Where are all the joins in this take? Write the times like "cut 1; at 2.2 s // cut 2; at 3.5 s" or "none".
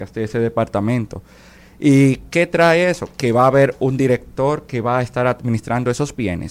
cut 1; at 1.6 s